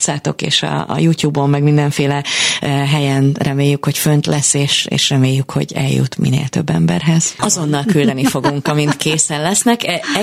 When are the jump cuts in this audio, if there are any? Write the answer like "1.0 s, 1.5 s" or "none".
7.4 s